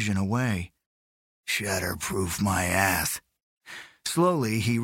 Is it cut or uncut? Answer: cut